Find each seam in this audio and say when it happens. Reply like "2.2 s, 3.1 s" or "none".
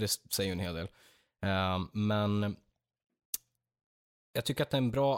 none